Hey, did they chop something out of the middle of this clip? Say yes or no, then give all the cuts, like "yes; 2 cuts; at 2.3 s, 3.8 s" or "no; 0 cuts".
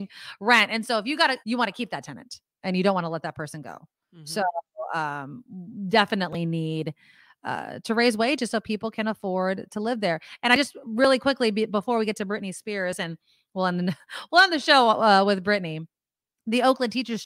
yes; 1 cut; at 1.4 s